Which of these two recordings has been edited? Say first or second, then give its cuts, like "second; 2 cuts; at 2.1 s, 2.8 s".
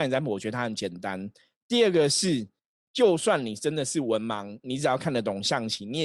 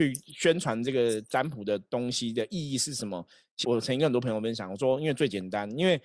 second; 1 cut; at 3.6 s